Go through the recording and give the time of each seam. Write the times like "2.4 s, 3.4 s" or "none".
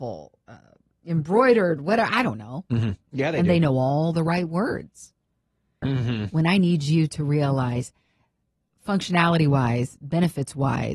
3.1 s, 5.8 s